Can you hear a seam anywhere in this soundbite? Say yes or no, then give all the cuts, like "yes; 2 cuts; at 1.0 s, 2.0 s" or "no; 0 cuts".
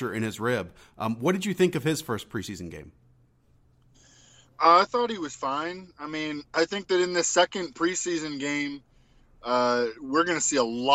no; 0 cuts